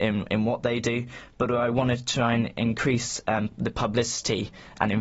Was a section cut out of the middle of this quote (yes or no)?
no